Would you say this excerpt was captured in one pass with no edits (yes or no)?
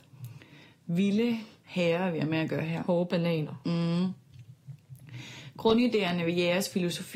yes